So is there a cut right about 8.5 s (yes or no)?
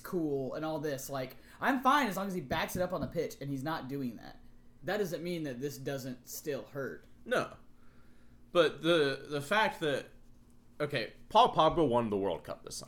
no